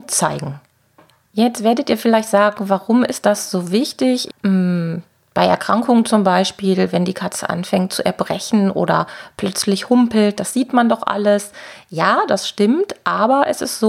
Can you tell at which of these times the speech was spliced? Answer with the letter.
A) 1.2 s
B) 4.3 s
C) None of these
B